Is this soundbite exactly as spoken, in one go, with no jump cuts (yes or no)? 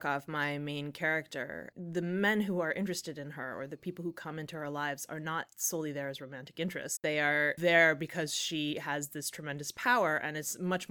no